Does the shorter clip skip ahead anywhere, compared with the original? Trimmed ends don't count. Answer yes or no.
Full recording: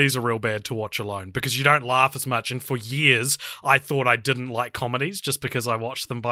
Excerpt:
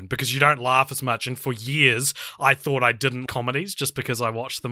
yes